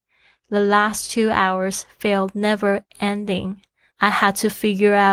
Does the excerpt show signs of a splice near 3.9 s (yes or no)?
yes